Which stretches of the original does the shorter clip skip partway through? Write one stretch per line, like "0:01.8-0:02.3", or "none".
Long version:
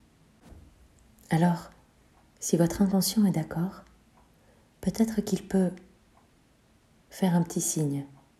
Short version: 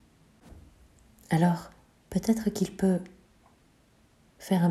0:02.0-0:04.7